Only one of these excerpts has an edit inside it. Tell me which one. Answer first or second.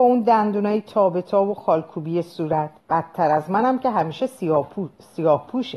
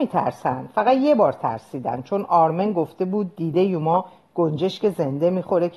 first